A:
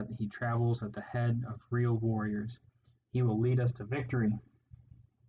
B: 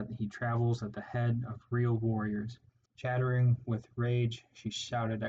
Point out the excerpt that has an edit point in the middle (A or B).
B